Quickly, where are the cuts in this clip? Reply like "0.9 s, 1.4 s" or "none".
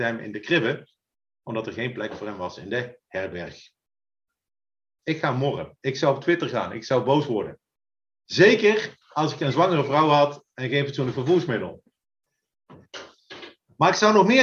5.0 s